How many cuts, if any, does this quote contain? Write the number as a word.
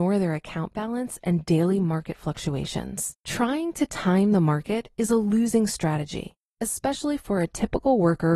one